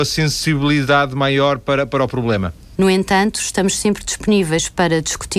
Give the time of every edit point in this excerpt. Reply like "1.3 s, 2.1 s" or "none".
2.7 s